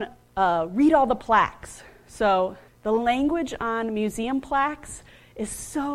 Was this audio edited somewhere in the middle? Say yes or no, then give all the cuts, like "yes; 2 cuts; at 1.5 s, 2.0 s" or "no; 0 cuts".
yes; 1 cut; at 2.7 s